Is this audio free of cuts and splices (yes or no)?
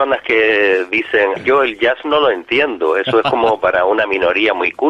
no